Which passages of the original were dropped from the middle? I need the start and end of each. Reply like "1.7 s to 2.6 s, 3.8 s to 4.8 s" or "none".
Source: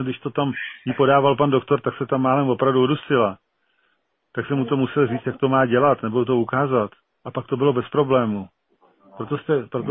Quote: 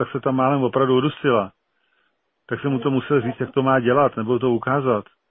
none